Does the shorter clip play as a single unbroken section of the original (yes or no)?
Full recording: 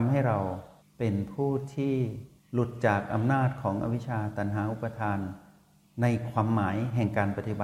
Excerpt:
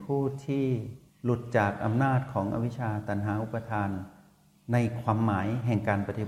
yes